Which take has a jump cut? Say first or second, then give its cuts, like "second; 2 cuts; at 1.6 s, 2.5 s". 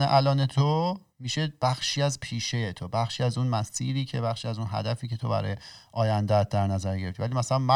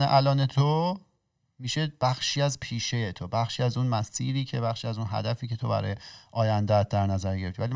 first; 1 cut; at 1.1 s